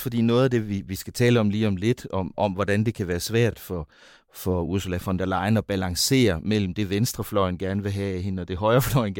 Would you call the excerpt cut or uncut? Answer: uncut